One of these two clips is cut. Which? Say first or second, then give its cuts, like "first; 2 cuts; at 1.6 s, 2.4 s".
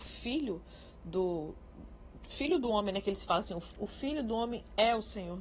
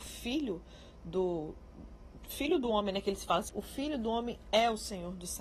second; 1 cut; at 3.5 s